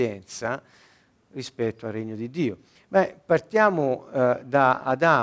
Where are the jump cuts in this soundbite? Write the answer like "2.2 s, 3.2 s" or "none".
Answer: 2.8 s